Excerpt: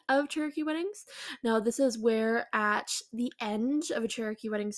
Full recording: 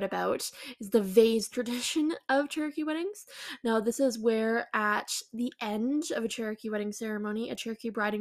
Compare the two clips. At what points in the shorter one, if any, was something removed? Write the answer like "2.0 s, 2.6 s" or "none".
none